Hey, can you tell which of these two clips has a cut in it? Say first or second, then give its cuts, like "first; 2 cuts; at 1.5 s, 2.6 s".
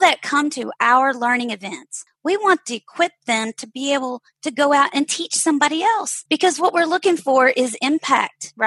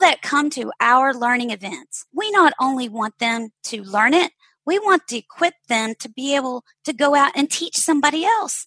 first; 1 cut; at 2.1 s